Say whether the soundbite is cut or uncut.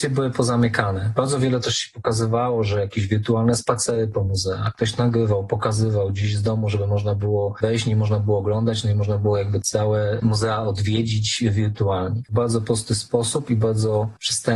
cut